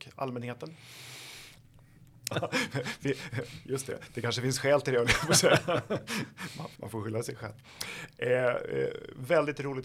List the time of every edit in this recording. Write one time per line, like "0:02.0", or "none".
0:02.3
0:06.8